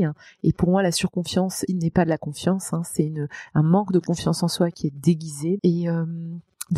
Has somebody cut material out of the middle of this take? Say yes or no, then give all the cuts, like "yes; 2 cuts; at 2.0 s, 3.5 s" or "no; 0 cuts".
yes; 2 cuts; at 1.7 s, 5.6 s